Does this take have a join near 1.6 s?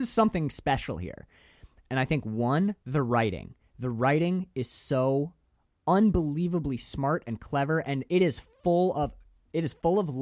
no; 0 cuts

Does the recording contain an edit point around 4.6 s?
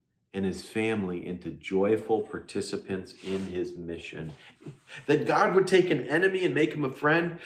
yes; 1 cut; at 4.6 s

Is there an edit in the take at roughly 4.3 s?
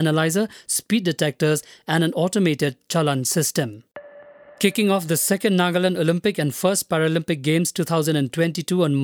no; 0 cuts

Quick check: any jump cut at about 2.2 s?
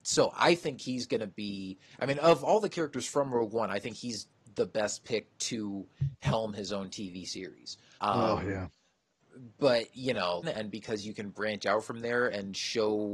no; 2 cuts; at 8.0 s, 10.4 s

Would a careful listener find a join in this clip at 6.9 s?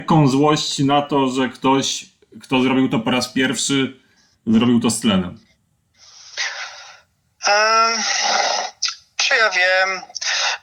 no; 0 cuts

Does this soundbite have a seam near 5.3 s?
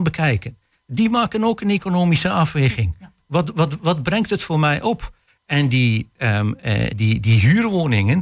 no; 1 cut; at 6.9 s

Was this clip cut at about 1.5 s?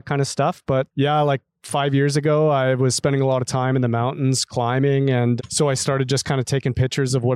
no; 1 cut; at 5.4 s

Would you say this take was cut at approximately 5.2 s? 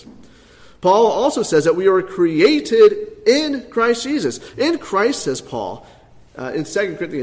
no; 0 cuts

